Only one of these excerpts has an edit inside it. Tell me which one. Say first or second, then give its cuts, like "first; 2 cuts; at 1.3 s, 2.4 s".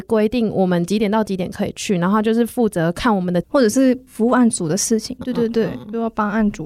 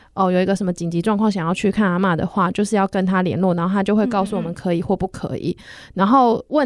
first; 2 cuts; at 3.4 s, 5.2 s